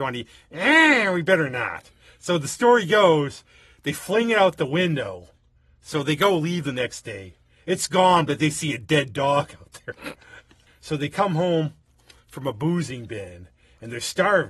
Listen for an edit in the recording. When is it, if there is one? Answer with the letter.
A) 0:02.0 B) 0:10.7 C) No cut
B